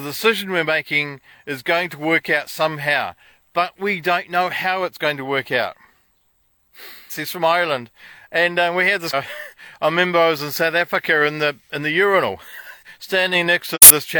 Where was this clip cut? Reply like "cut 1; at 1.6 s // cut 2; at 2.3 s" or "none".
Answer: cut 1; at 7.1 s // cut 2; at 9.1 s